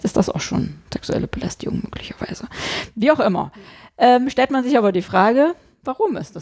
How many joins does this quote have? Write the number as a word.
zero